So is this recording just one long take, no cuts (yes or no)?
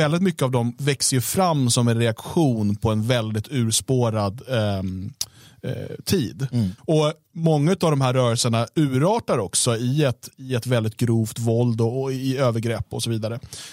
no